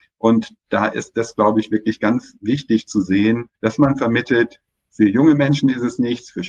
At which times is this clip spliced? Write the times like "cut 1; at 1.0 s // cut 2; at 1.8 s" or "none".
cut 1; at 3.5 s